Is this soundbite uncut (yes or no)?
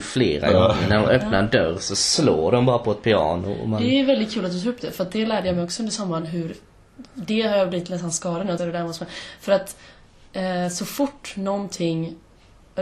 no